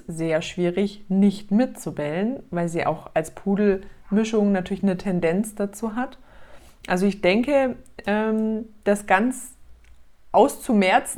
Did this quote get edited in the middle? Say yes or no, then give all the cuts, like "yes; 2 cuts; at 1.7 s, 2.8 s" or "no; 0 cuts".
no; 0 cuts